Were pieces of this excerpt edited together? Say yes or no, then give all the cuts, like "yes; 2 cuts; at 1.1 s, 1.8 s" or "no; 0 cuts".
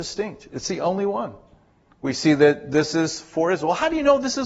no; 0 cuts